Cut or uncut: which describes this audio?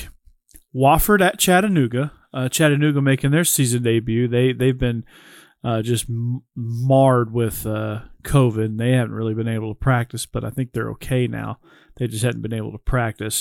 uncut